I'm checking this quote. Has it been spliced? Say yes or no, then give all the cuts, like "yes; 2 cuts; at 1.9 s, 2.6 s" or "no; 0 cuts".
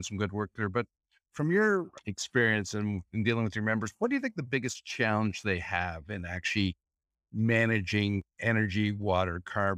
no; 0 cuts